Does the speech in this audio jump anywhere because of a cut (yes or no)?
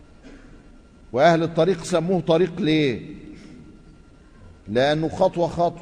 no